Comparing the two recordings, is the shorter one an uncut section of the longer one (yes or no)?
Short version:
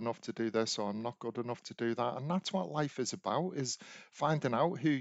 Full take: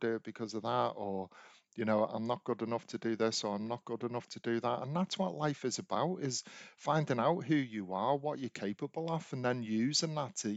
yes